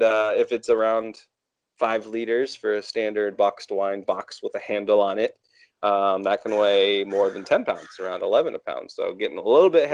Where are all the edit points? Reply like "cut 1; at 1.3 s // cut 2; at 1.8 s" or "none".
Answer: none